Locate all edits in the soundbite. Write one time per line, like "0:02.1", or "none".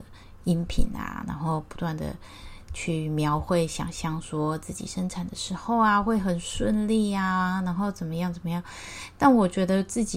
none